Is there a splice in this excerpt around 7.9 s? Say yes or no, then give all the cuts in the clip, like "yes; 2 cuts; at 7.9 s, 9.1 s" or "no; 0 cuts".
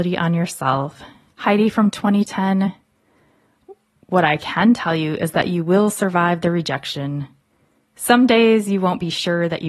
no; 1 cut; at 1.3 s